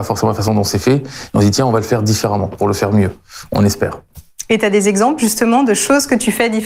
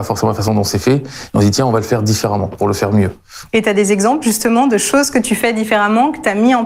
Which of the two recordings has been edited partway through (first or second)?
second